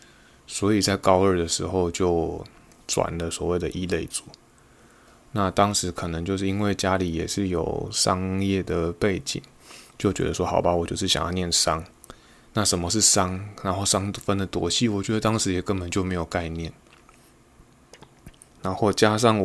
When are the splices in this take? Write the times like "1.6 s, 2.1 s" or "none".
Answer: none

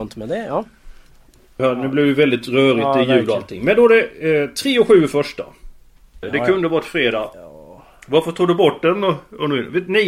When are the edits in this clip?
1.6 s, 6.2 s, 7.3 s

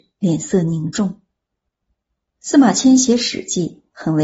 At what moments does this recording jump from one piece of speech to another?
none

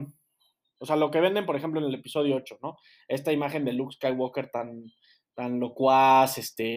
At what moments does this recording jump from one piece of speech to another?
none

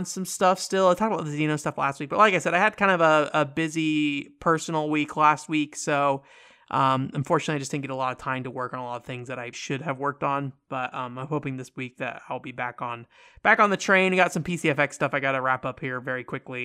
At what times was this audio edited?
9.5 s

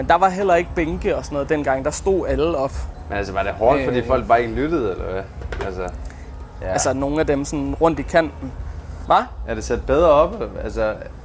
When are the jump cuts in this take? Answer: 6.6 s, 9.1 s

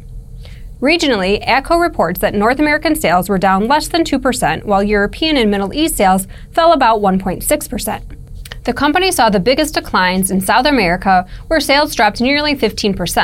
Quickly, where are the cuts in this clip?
none

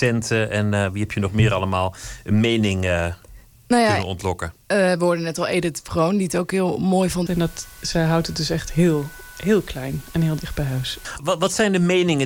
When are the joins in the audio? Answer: 7.3 s, 11.2 s

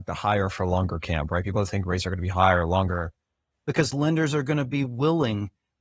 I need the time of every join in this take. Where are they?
3.5 s

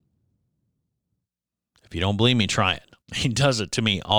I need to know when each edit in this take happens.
3.0 s

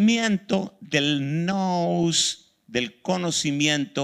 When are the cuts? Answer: none

